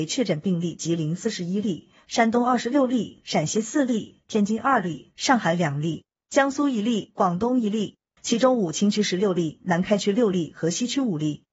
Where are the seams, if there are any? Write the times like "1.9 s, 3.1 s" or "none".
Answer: 8.2 s